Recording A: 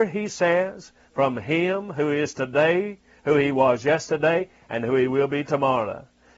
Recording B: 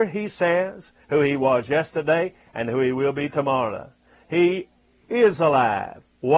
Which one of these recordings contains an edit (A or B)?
B